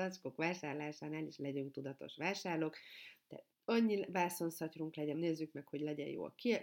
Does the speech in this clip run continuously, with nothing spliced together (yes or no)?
no